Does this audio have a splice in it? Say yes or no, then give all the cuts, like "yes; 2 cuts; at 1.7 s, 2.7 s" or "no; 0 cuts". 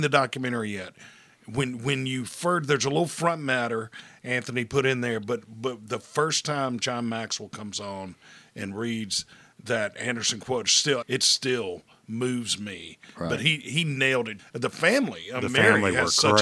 yes; 2 cuts; at 11.0 s, 14.4 s